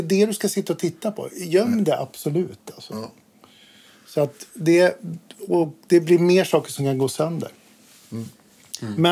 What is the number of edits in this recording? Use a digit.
1